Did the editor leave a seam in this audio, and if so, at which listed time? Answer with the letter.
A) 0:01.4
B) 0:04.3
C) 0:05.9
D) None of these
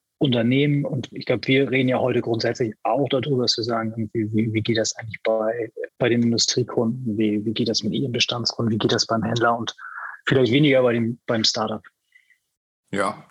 C